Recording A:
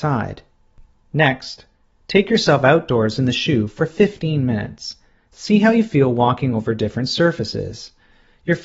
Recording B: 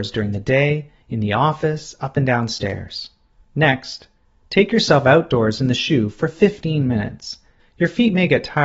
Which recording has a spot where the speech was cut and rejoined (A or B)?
B